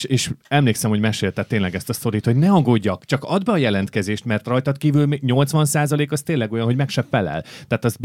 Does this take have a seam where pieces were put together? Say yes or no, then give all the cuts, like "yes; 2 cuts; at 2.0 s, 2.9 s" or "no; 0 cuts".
no; 0 cuts